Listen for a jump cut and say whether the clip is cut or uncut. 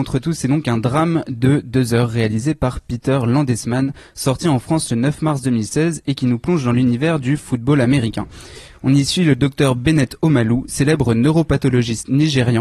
uncut